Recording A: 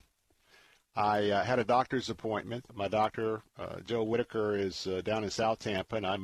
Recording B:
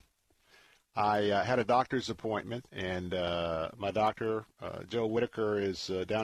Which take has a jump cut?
A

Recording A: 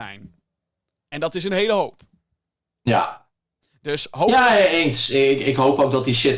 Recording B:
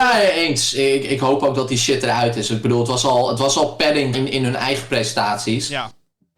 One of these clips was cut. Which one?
B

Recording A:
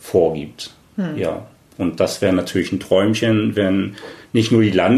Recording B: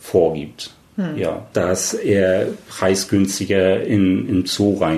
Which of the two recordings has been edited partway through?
B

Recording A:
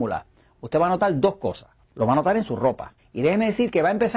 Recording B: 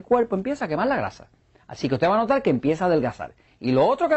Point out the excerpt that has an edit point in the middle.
A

